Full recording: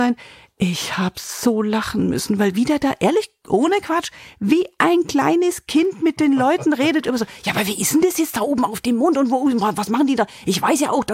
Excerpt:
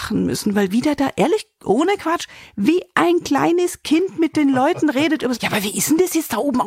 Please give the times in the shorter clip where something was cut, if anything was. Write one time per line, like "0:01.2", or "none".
0:05.4